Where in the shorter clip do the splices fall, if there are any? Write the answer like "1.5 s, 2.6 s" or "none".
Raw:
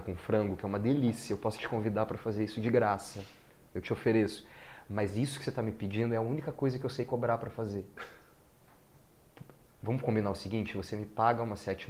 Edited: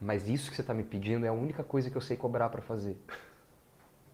none